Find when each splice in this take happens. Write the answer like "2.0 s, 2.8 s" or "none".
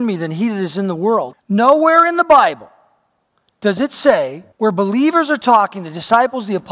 1.3 s, 4.5 s